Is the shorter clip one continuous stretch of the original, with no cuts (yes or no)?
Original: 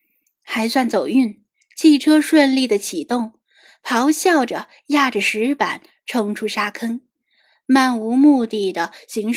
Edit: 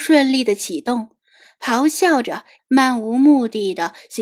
no